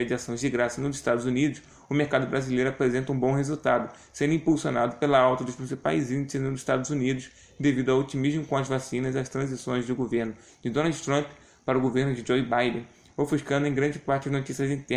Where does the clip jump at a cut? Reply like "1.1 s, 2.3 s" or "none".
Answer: none